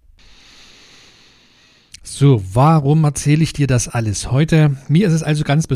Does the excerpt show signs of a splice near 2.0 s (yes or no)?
no